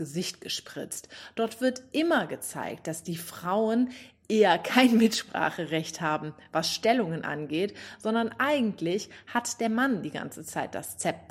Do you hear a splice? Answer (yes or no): no